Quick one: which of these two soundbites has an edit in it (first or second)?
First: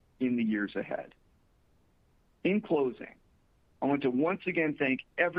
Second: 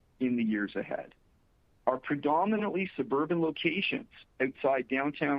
second